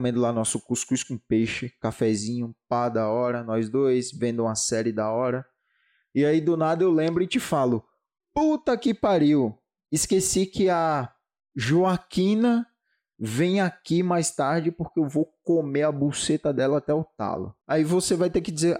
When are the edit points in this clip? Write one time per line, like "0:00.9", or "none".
0:17.6